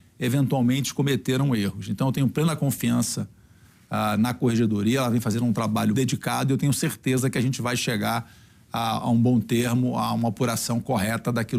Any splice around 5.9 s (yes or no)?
yes